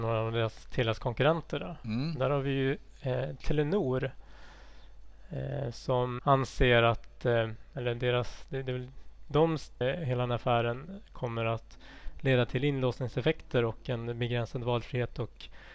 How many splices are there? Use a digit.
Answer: 2